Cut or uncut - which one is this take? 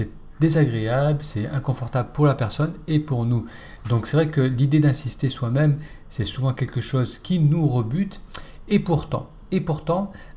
uncut